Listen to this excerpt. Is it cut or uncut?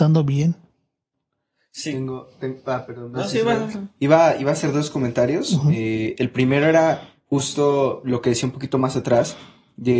uncut